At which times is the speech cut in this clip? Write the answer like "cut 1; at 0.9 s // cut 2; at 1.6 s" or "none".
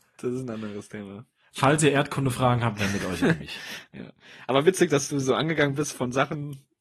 none